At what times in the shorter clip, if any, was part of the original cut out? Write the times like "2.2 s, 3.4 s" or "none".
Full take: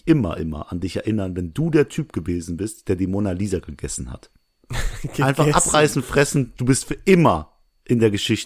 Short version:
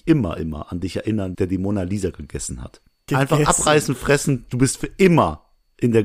1.3 s, 3.1 s